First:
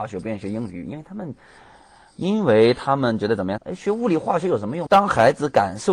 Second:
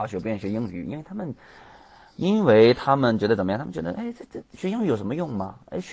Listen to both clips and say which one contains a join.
first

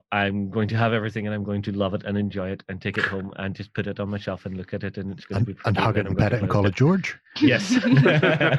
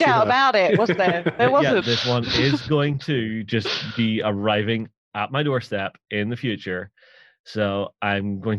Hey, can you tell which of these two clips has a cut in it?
second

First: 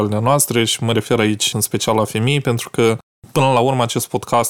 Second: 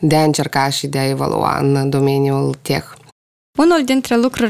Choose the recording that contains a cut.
first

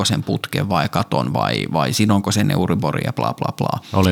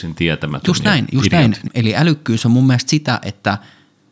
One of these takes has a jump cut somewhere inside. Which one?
second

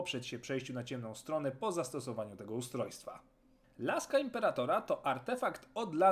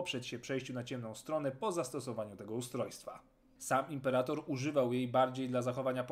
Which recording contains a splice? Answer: second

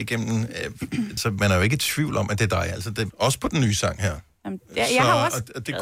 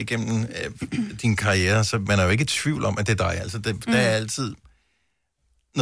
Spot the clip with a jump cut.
first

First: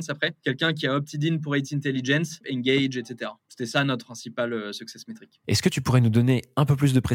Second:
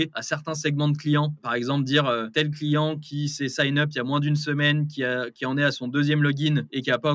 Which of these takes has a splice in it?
first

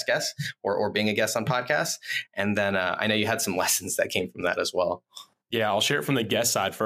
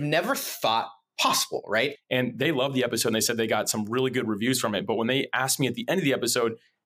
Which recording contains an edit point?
second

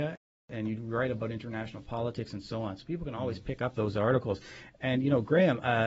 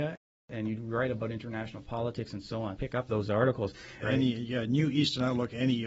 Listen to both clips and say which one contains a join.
second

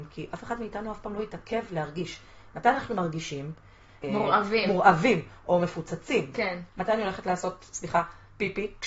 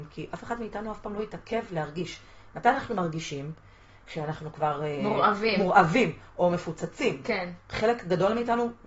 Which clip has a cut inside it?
first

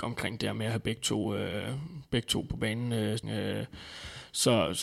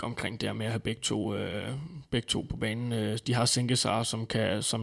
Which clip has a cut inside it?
first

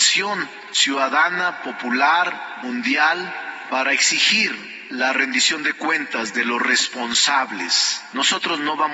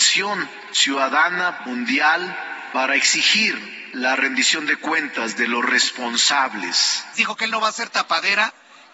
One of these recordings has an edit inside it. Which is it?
second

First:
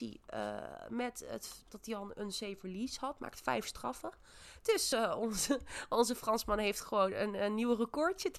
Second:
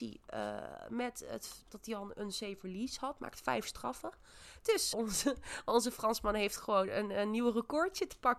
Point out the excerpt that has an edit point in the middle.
second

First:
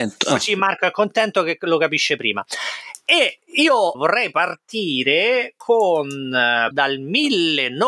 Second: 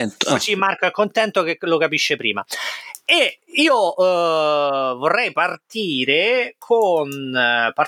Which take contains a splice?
first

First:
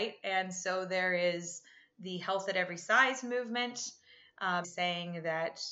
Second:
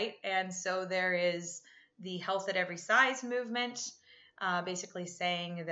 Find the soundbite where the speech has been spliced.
first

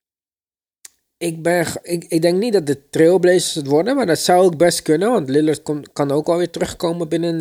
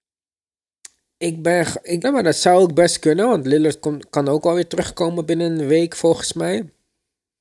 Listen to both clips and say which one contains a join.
second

